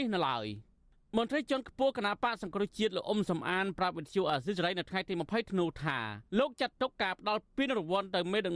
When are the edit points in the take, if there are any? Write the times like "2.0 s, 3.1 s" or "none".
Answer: 6.3 s

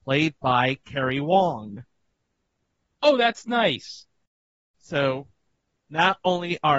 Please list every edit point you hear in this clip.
2.9 s

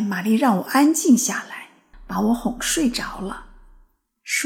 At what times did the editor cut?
1.9 s

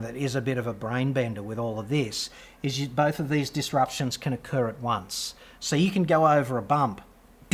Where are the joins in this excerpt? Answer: none

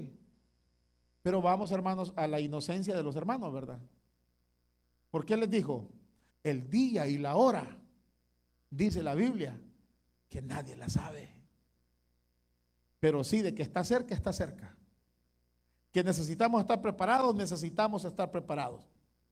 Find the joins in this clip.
6.3 s

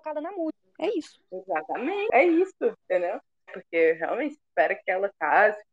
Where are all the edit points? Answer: 3.5 s

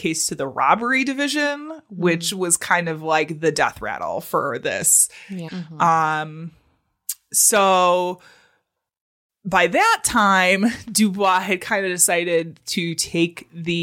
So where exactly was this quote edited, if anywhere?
5.5 s

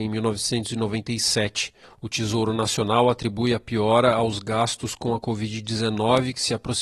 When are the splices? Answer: 1.8 s

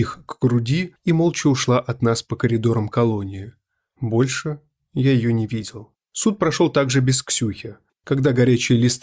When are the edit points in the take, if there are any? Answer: 6.0 s, 7.9 s

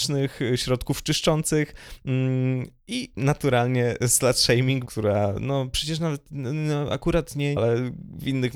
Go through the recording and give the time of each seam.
4.9 s, 7.6 s

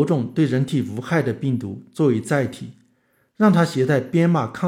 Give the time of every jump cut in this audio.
none

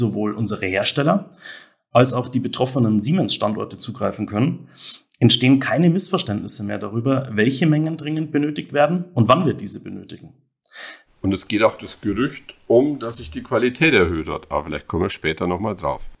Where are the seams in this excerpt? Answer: 11.1 s

